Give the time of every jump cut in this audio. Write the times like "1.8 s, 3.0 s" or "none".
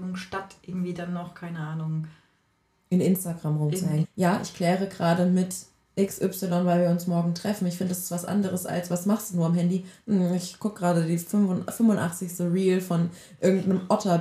4.0 s